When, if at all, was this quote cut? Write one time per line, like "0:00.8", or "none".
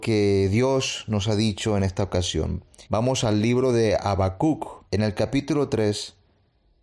0:02.9
0:04.9